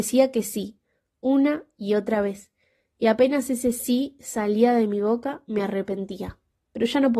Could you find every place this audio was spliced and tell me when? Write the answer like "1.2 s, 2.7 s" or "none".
none